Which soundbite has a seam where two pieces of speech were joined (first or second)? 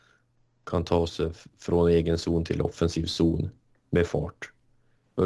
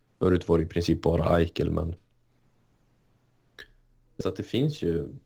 second